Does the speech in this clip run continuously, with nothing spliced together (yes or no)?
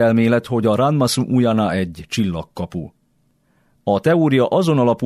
yes